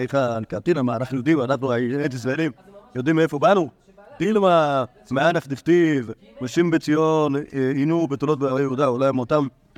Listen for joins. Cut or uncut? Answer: uncut